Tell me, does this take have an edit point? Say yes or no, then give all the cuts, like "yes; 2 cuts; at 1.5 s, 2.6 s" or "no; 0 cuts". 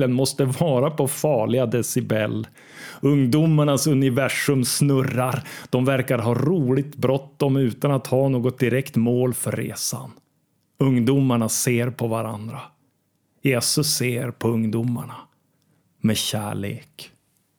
no; 0 cuts